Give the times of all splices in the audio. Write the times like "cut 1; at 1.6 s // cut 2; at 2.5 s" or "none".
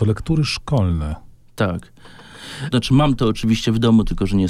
cut 1; at 2.7 s